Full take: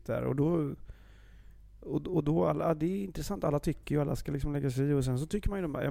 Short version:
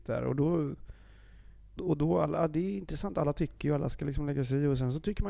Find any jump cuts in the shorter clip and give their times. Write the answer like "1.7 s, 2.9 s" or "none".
1.8 s